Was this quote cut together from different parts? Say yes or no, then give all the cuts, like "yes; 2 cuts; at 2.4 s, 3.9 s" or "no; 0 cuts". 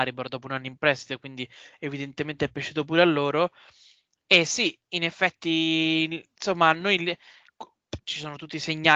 yes; 1 cut; at 8.0 s